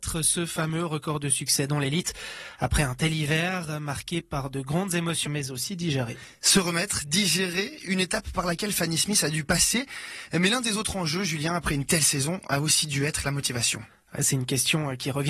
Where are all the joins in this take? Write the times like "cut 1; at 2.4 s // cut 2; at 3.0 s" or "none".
cut 1; at 5.3 s